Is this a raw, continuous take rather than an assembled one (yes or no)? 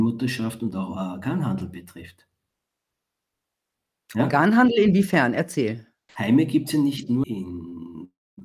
no